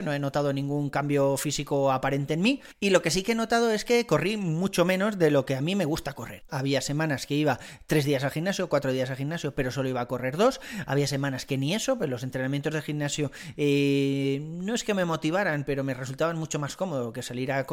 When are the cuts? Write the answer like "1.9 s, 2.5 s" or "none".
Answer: 6.5 s